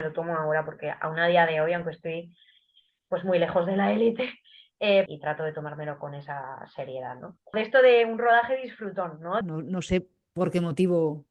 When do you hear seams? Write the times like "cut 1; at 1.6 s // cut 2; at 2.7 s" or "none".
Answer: cut 1; at 5.1 s // cut 2; at 7.5 s // cut 3; at 9.4 s

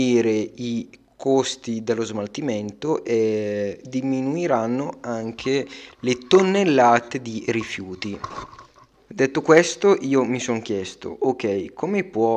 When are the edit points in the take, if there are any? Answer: none

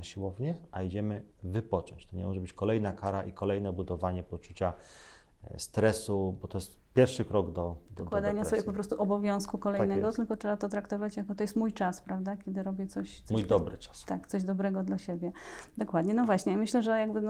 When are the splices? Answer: none

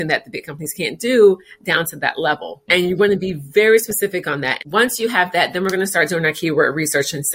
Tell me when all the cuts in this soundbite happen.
cut 1; at 2.7 s // cut 2; at 4.6 s

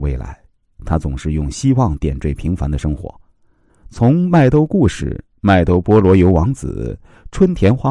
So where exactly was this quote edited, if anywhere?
cut 1; at 3.7 s

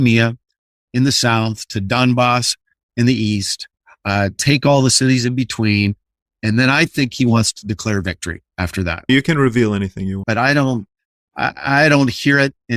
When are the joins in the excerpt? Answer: cut 1; at 9.1 s // cut 2; at 10.2 s

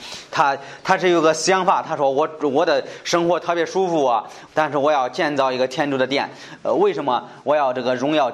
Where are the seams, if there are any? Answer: cut 1; at 4.5 s

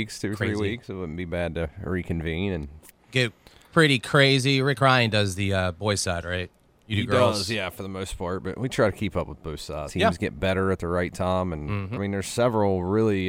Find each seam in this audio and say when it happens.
cut 1; at 9.9 s // cut 2; at 12.0 s

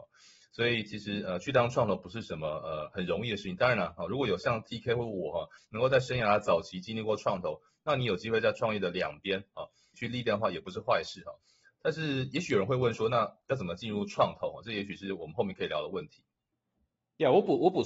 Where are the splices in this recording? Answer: cut 1; at 9.9 s

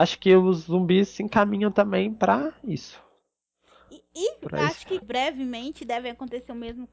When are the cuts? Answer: cut 1; at 5.0 s

